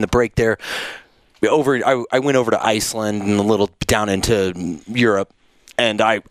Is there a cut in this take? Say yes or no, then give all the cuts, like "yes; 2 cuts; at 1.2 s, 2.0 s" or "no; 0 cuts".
no; 0 cuts